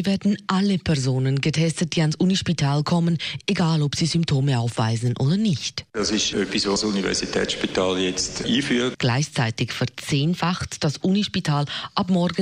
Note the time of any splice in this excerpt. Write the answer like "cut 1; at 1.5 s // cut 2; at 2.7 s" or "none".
cut 1; at 8.9 s